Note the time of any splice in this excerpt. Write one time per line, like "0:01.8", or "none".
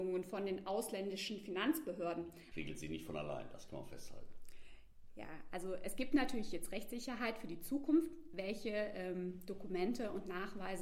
0:02.5

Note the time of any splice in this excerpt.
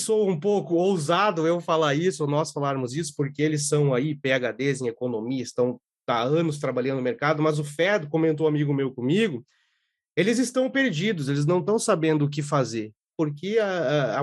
0:13.1

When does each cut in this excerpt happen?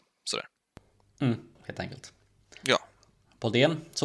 0:01.6

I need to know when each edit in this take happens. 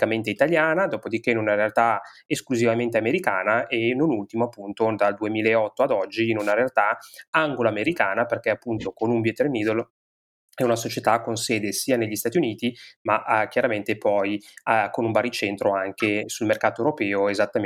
none

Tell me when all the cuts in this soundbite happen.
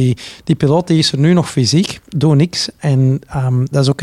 none

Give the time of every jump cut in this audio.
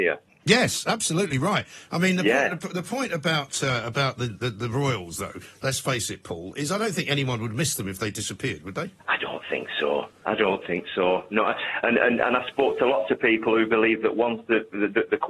0:09.0

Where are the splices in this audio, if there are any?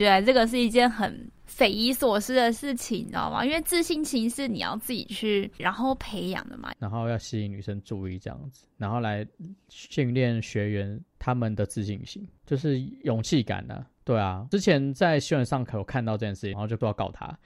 0:05.6
0:06.7
0:16.5

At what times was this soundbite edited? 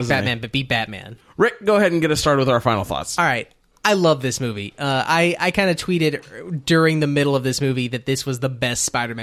none

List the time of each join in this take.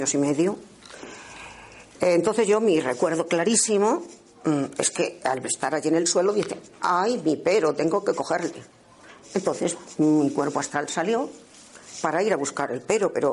0:01.9

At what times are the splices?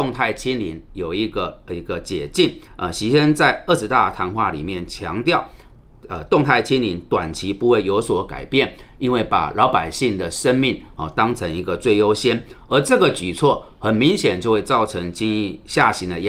0:02.7

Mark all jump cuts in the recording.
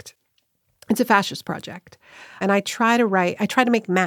0:02.4

